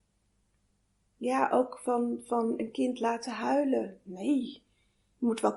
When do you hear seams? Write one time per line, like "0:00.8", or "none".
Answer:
none